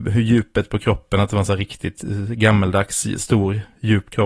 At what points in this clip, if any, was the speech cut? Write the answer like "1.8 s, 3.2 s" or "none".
none

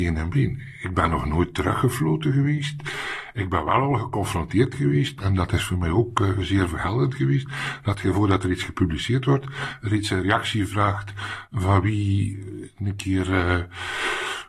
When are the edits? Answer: none

